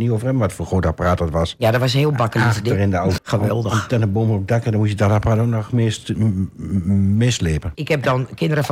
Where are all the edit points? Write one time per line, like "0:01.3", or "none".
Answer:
0:03.2
0:07.7